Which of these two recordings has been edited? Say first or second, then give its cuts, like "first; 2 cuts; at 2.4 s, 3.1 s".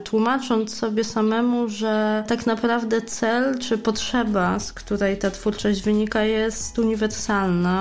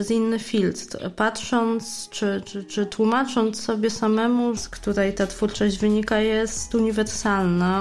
second; 2 cuts; at 2.4 s, 4.6 s